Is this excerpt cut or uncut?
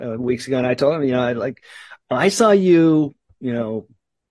uncut